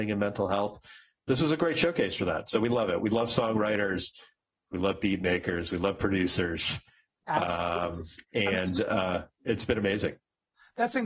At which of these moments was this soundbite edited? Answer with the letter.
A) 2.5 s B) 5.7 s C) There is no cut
C